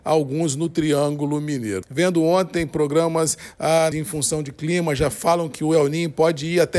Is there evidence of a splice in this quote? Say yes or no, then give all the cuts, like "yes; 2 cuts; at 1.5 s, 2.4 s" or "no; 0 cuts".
yes; 2 cuts; at 1.8 s, 3.9 s